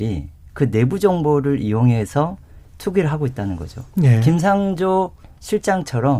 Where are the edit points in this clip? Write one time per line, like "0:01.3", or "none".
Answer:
none